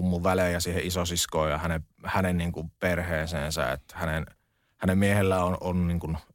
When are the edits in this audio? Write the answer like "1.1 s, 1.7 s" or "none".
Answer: none

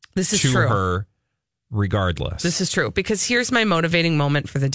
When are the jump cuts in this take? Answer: none

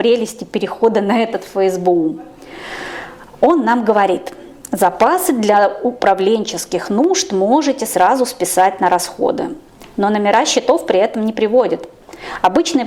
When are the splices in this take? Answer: none

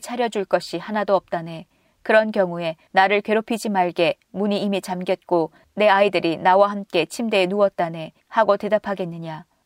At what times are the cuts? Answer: 8.2 s

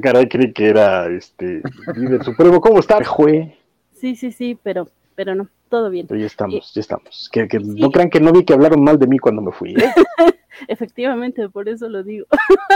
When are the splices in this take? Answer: 3.0 s

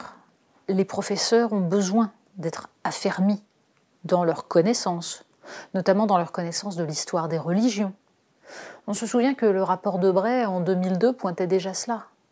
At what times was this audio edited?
none

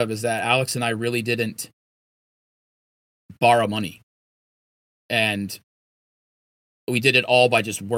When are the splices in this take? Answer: none

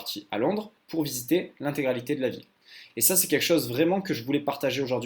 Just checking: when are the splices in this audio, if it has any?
2.9 s

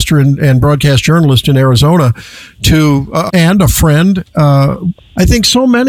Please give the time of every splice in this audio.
3.3 s, 5.0 s

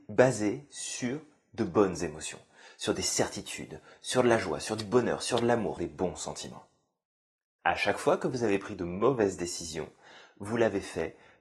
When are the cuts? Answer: 5.8 s

